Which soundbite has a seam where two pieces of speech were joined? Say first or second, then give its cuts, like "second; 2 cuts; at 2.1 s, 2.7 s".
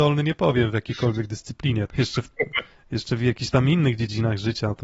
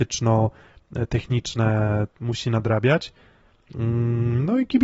first; 1 cut; at 1.9 s